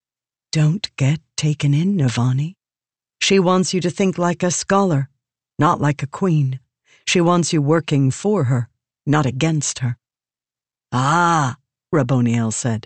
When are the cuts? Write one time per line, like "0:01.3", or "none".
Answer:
0:10.7